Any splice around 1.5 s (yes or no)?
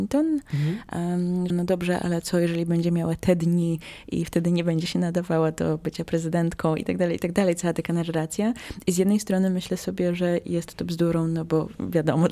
yes